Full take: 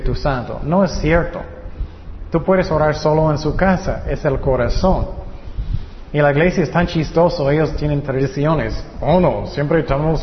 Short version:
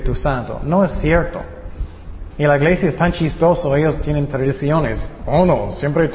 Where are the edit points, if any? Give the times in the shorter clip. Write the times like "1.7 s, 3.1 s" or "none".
2.3 s